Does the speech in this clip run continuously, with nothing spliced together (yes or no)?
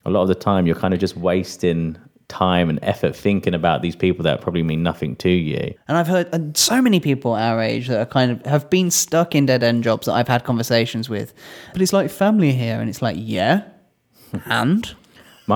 no